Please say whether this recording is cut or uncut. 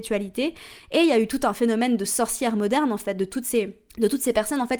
cut